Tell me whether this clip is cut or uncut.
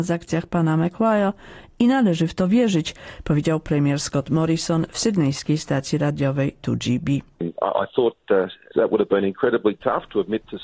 cut